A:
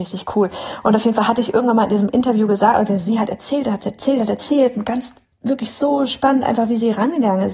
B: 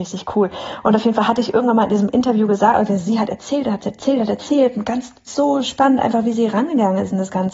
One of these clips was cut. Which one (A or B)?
B